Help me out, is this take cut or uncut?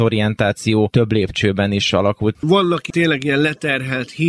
uncut